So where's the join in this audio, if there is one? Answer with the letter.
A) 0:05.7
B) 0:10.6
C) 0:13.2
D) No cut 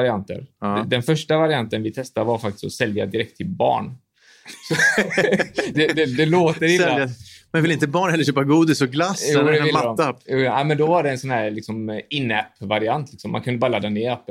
A